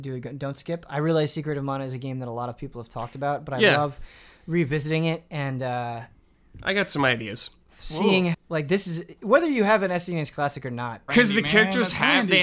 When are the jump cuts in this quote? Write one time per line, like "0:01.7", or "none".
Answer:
0:08.3
0:11.1